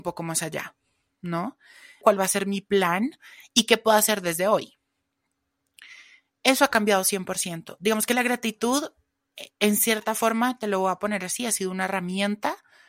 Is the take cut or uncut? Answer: cut